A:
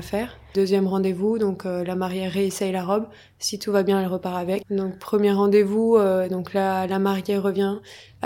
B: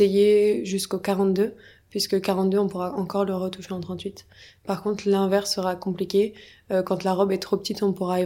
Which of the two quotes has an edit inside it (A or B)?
A